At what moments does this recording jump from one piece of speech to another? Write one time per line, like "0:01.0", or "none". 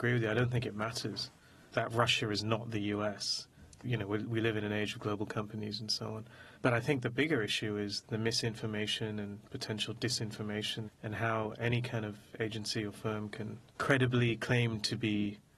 0:06.5
0:10.9
0:13.7

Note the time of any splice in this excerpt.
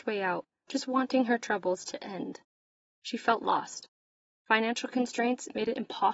none

